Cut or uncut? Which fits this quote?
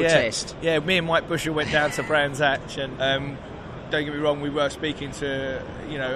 cut